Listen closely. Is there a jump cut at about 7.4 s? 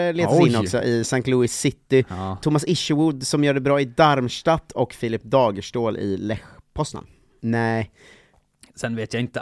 yes; 1 cut; at 7.4 s

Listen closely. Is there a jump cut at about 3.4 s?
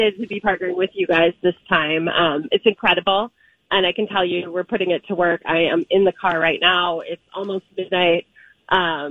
no; 0 cuts

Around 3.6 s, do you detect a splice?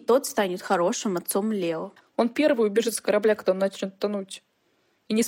no; 1 cut; at 2.0 s

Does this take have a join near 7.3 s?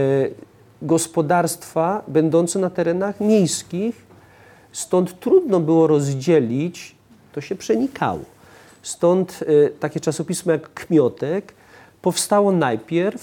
yes; 1 cut; at 7.3 s

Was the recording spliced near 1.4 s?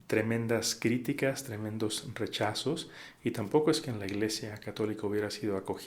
no; 0 cuts

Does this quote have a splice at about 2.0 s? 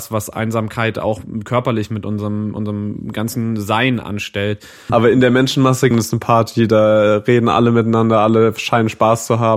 no; 2 cuts; at 4.9 s, 5.9 s

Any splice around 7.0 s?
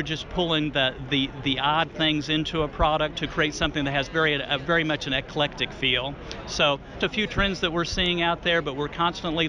yes; 1 cut; at 7.0 s

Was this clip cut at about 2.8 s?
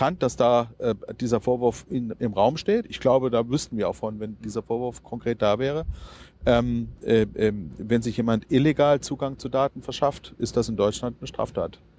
no; 0 cuts

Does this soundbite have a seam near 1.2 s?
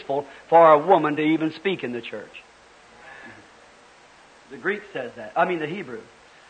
no; 0 cuts

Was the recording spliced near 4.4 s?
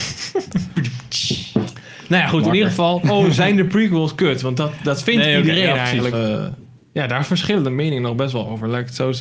no; 2 cuts; at 3.0 s, 6.1 s

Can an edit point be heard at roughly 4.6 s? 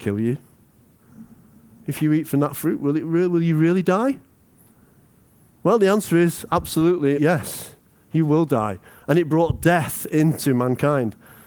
no; 1 cut; at 7.2 s

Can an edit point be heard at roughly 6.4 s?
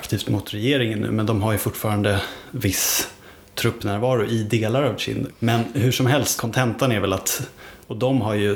yes; 2 cuts; at 5.3 s, 6.4 s

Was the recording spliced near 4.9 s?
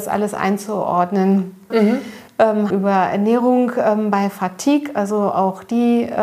no; 2 cuts; at 1.7 s, 2.7 s

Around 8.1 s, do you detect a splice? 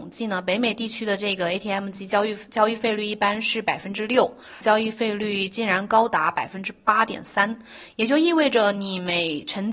no; 1 cut; at 4.6 s

